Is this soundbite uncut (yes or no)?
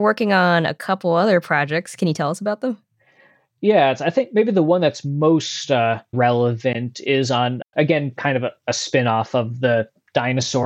yes